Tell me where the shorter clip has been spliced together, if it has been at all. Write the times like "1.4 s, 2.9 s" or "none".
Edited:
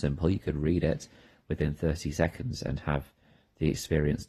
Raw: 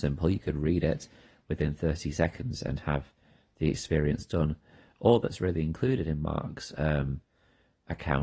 none